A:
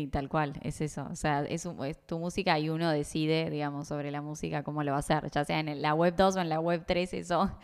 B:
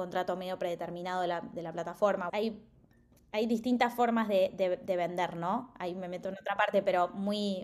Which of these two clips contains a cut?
B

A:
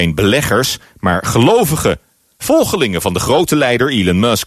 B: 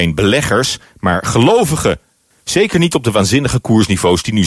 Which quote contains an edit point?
B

